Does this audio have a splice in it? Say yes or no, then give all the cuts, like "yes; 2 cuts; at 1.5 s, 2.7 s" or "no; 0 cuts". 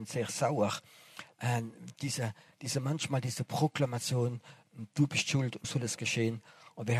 yes; 1 cut; at 5.6 s